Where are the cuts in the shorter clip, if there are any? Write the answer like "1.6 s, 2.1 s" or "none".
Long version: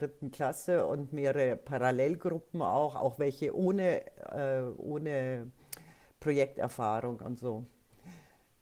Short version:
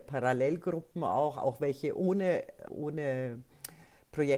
2.7 s

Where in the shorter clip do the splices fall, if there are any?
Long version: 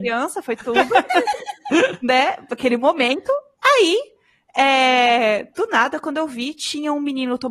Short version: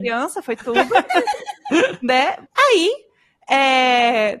2.4 s

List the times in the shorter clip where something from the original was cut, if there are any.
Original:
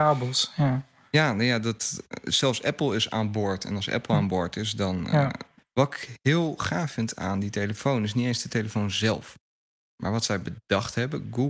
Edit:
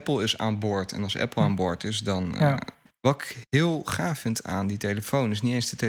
none

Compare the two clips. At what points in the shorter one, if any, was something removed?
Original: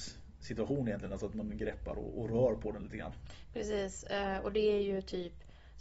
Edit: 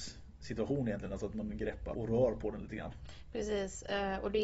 1.9 s

